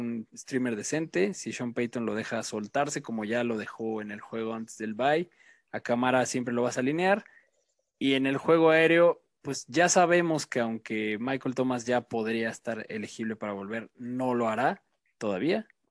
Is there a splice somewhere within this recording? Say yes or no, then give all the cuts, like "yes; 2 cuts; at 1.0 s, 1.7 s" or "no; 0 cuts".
no; 0 cuts